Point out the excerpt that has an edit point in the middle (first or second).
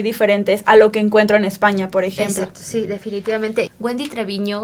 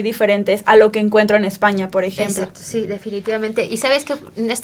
first